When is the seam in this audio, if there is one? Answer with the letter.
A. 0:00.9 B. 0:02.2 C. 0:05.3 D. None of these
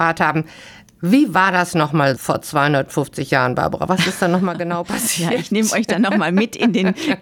B